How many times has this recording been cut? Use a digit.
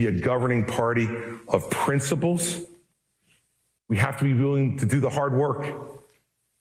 0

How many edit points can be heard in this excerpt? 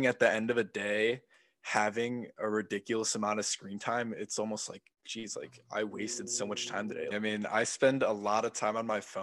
1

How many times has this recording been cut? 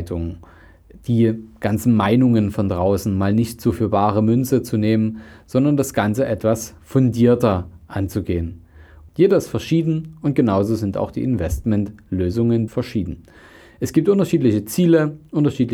2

